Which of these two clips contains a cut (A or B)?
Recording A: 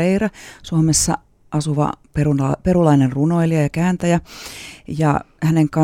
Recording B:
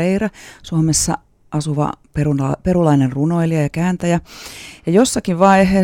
B